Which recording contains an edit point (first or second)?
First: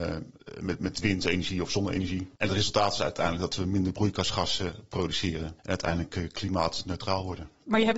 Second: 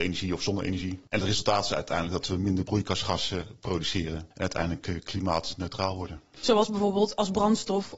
second